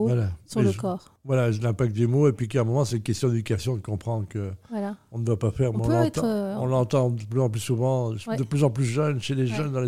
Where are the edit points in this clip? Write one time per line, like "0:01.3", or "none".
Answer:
none